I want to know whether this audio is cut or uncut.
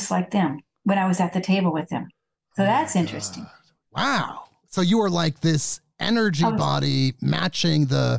uncut